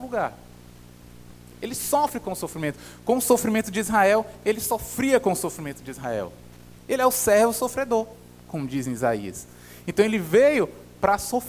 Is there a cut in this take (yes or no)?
yes